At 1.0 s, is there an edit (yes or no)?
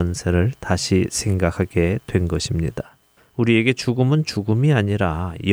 no